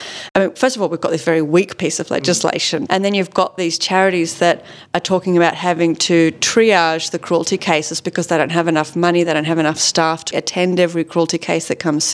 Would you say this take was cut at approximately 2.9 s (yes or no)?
yes